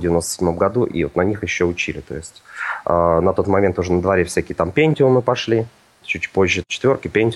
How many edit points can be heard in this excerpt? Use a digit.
0